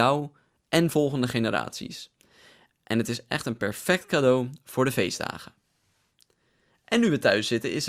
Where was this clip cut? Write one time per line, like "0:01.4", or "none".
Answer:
none